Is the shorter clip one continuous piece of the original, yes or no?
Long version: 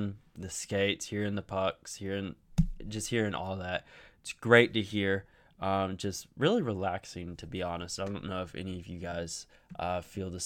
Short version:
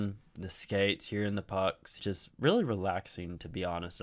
no